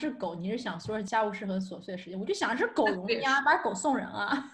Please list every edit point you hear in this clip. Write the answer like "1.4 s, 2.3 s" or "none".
none